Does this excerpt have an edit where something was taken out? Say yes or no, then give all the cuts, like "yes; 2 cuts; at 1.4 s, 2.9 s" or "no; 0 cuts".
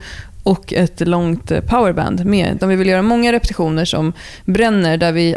yes; 1 cut; at 2.6 s